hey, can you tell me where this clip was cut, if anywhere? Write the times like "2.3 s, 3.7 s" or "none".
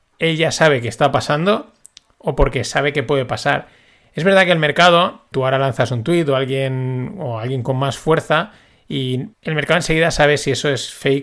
5.3 s, 9.3 s